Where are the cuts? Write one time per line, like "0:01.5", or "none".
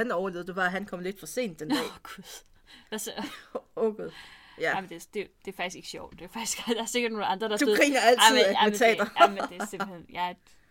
none